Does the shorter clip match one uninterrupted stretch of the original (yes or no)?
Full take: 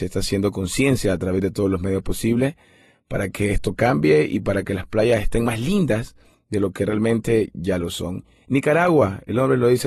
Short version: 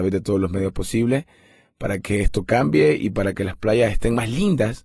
yes